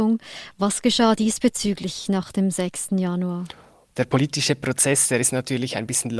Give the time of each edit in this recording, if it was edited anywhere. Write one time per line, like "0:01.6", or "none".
none